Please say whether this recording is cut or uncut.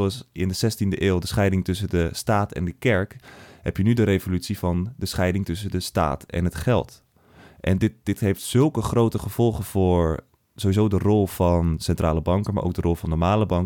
uncut